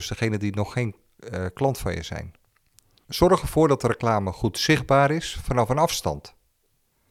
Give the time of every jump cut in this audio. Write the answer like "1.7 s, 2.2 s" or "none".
3.0 s